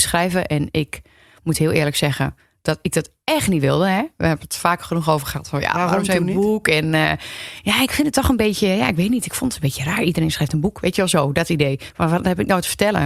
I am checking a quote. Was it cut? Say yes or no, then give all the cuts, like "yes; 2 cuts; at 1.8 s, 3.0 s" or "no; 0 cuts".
no; 0 cuts